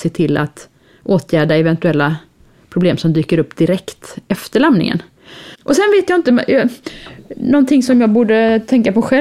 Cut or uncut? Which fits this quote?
cut